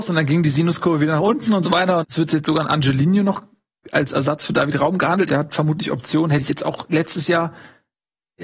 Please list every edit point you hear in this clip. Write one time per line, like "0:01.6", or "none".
0:02.0
0:05.3